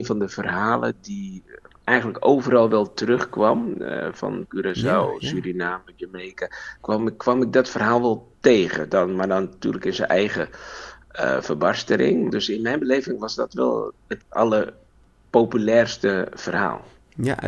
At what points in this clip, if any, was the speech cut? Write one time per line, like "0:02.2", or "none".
0:04.5
0:12.3